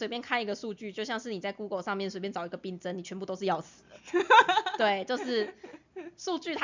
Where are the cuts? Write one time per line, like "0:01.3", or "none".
none